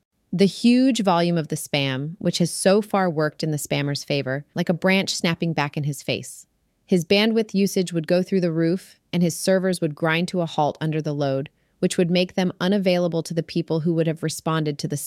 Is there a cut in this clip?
yes; 2 cuts; at 4.5 s, 6.7 s

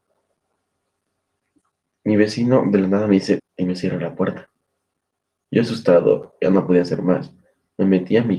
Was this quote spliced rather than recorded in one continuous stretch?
yes; 1 cut; at 3.4 s

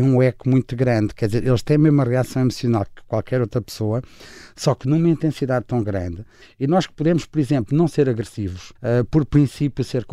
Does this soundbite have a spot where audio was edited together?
yes; 2 cuts; at 6.4 s, 8.8 s

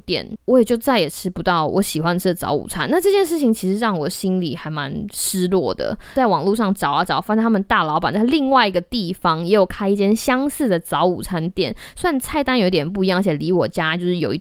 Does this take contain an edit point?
no; 0 cuts

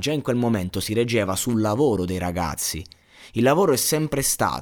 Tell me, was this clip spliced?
no; 0 cuts

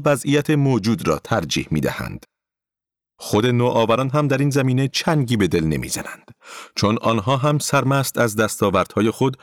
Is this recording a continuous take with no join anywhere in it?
yes; 0 cuts

